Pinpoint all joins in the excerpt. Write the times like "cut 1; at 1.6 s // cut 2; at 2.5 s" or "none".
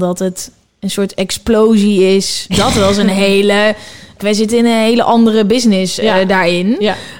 cut 1; at 2.5 s // cut 2; at 4.2 s

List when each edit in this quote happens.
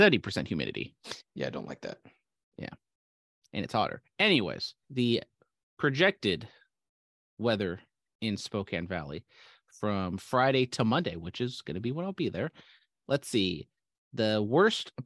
cut 1; at 4.8 s

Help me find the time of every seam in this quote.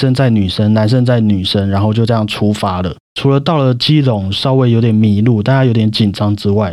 cut 1; at 3.0 s

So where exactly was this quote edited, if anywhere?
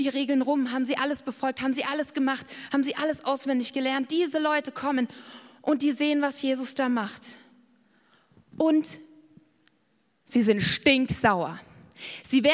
none

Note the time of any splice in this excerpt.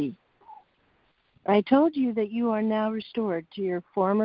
cut 1; at 1.3 s

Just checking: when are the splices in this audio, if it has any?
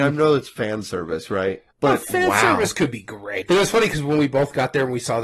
cut 1; at 1.7 s // cut 2; at 3.4 s

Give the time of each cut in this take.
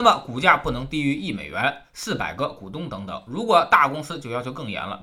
none

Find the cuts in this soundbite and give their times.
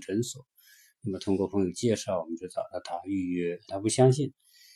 cut 1; at 3.7 s

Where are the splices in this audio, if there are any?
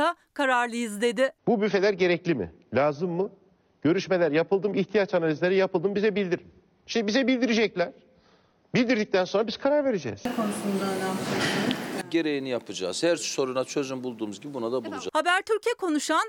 none

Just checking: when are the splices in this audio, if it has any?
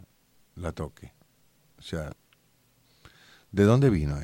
none

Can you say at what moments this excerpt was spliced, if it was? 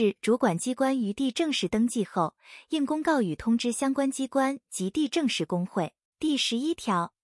cut 1; at 6.0 s

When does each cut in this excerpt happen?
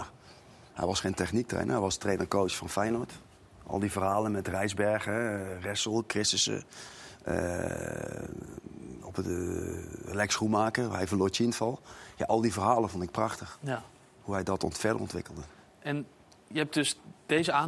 none

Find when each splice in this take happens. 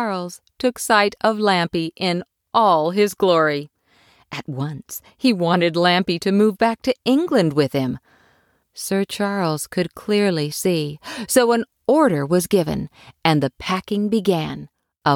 cut 1; at 8.6 s

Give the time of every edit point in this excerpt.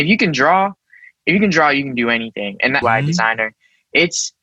cut 1; at 2.8 s

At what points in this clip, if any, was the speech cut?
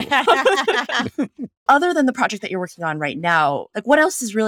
cut 1; at 1.7 s

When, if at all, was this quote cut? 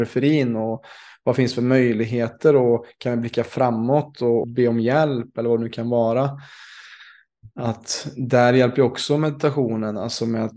cut 1; at 4.4 s

